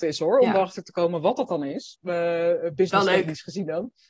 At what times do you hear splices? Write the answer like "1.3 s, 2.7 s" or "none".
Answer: 1.9 s